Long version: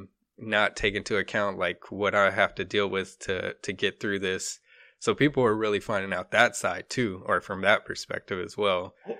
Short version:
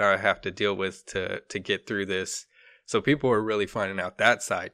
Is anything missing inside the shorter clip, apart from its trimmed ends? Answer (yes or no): no